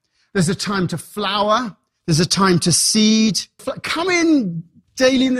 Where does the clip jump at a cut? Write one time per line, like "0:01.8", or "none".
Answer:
0:03.6